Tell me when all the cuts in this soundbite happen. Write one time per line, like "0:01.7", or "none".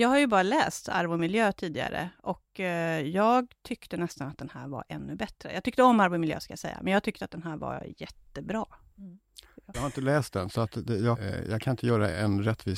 0:09.7
0:11.1